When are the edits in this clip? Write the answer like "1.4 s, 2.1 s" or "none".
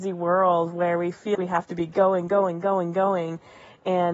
1.3 s